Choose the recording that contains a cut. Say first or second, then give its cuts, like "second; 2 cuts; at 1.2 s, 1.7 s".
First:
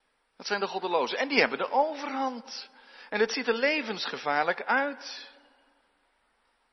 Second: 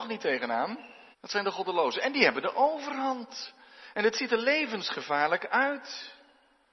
second; 1 cut; at 1.1 s